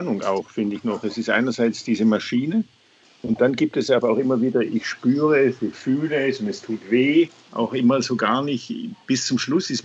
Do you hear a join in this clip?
yes; 1 cut; at 7.5 s

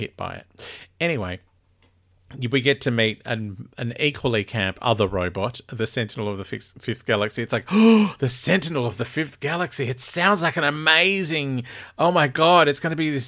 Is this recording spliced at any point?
no; 0 cuts

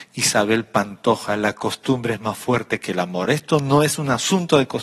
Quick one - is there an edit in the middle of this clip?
no; 0 cuts

